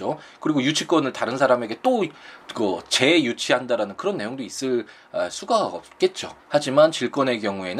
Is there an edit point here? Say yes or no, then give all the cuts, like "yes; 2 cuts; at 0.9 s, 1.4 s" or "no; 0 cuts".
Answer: yes; 1 cut; at 6.4 s